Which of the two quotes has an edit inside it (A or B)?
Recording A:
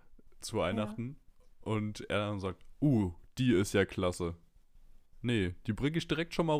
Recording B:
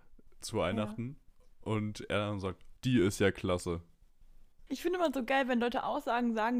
B